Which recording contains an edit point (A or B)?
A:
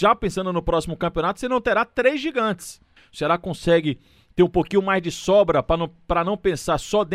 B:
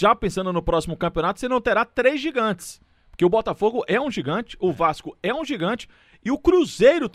A